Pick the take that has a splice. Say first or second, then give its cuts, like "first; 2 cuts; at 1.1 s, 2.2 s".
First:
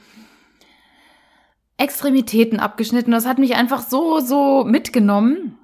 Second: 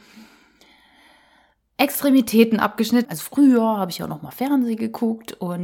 second; 1 cut; at 3.0 s